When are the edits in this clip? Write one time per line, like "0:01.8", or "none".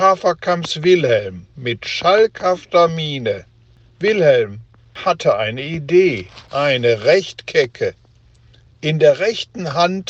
0:04.8